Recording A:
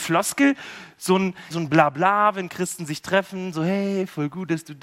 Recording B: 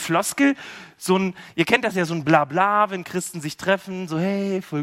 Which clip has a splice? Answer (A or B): A